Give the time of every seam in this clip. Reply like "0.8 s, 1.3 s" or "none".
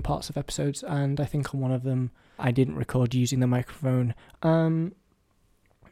2.4 s, 4.4 s